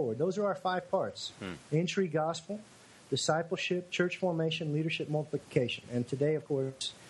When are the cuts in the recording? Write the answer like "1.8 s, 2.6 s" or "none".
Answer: none